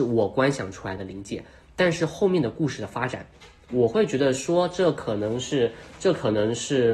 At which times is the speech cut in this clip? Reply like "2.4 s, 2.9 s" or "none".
none